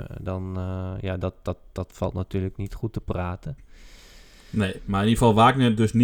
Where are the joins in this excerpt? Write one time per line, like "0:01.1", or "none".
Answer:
none